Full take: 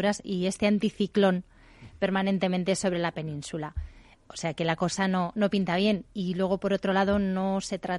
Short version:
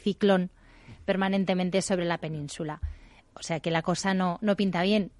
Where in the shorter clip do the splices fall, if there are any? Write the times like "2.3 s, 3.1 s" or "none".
none